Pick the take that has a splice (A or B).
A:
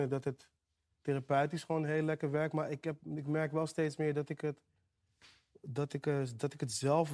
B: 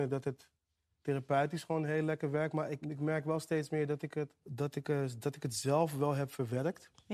B